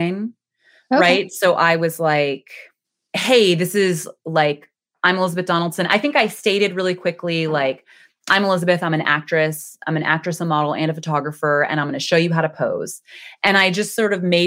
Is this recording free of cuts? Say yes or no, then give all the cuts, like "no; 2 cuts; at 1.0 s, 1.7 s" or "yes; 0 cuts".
yes; 0 cuts